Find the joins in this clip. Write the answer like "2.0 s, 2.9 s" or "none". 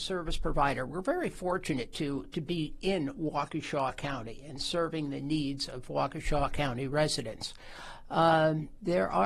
none